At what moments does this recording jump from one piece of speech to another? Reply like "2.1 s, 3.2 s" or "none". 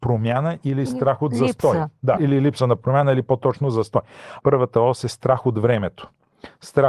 2.2 s, 4.4 s